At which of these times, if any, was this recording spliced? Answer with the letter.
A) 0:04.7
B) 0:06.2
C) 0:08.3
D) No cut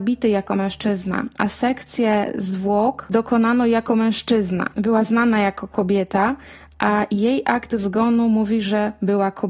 A